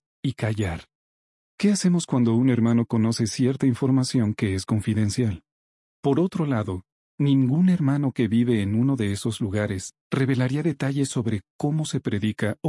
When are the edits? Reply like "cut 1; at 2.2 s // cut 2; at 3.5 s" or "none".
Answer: cut 1; at 1.4 s // cut 2; at 5.9 s